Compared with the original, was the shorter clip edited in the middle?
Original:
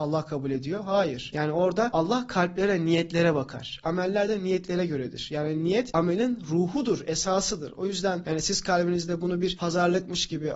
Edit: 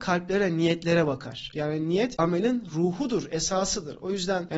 yes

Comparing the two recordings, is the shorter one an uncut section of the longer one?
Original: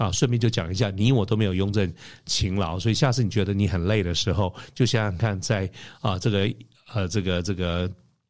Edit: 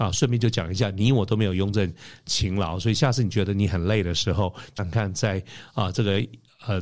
no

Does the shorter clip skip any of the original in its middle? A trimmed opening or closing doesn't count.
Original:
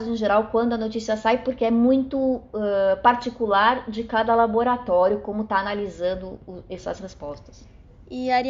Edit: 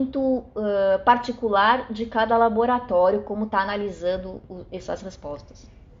no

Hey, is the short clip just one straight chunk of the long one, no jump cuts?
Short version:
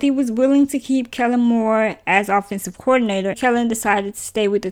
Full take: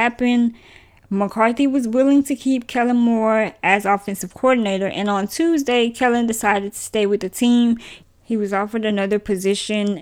no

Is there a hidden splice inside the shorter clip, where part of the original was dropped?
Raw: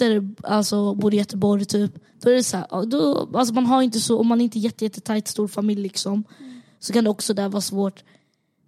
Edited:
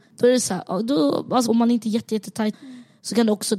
yes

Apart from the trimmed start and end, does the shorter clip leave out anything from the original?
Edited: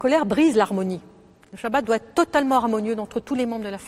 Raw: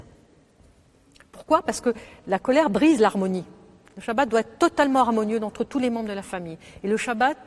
no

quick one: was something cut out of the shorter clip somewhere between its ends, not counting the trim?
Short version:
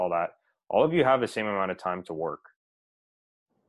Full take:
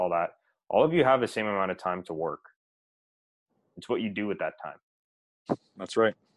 no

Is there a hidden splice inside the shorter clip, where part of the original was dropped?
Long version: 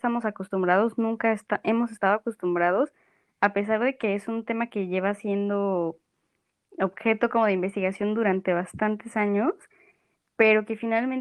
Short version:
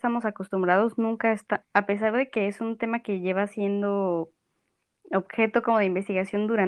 yes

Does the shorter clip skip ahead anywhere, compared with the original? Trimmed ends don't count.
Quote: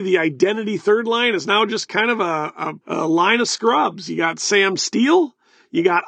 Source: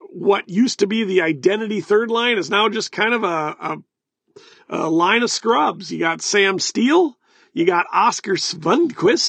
yes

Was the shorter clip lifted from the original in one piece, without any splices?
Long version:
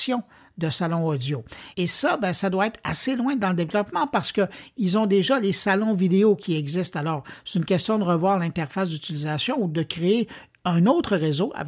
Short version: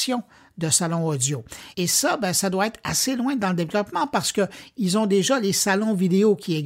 yes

